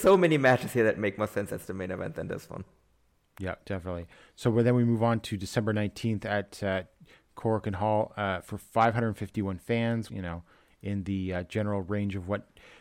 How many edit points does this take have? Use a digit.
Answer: 1